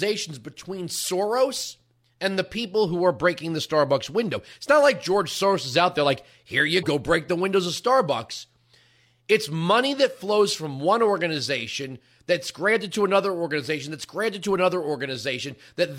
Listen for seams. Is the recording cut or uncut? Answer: cut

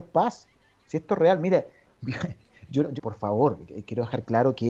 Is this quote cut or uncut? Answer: cut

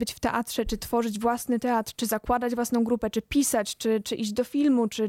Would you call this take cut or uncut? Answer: uncut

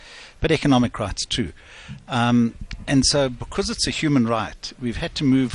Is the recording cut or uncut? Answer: uncut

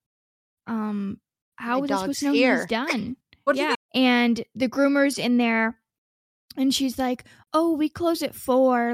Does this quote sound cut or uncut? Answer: cut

